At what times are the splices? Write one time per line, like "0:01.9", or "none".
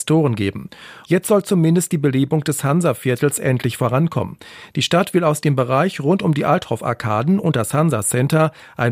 0:01.0